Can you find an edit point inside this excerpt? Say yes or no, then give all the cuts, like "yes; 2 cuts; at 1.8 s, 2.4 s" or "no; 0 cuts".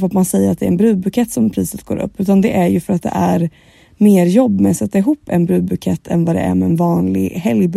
no; 0 cuts